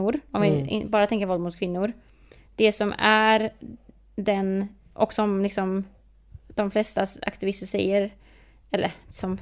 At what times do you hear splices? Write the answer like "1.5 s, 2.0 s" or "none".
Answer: none